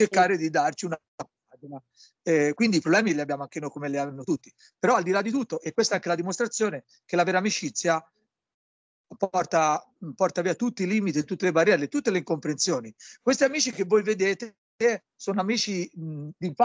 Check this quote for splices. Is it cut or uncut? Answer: uncut